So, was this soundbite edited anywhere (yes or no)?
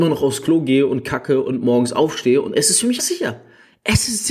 yes